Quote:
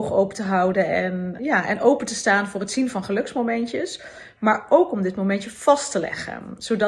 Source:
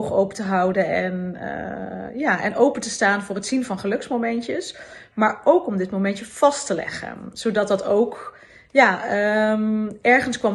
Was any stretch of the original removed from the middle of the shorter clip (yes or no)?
yes